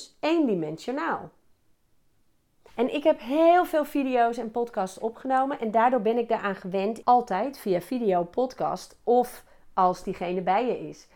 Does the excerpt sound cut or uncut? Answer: cut